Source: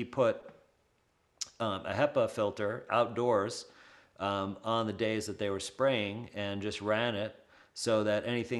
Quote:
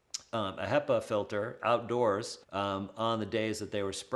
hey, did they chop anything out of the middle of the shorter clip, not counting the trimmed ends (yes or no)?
yes